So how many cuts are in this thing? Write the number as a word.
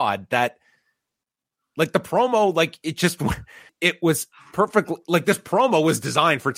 one